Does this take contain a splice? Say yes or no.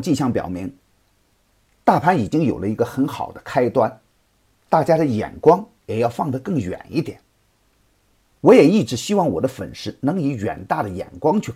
yes